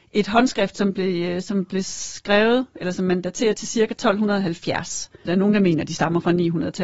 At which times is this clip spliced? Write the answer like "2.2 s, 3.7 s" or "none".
5.3 s